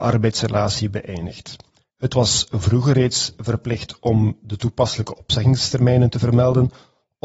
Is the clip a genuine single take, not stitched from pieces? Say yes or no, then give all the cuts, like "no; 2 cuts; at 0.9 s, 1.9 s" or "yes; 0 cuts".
no; 1 cut; at 1.9 s